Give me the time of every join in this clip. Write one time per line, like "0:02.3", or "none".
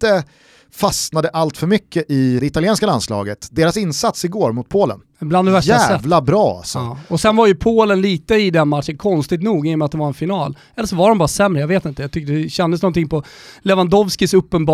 0:02.4